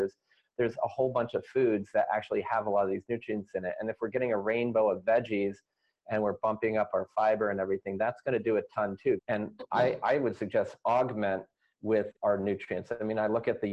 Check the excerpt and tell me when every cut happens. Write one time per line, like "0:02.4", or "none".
0:09.2
0:12.2